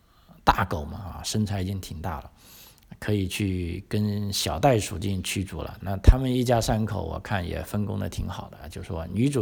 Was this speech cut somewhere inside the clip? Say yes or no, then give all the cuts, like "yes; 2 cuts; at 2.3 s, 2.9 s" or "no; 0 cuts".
yes; 1 cut; at 5.8 s